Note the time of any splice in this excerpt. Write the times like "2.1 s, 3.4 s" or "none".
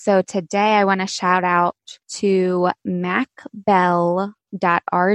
2.0 s